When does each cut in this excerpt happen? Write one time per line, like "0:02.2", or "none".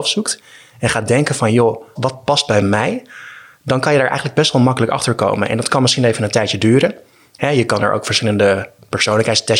0:02.0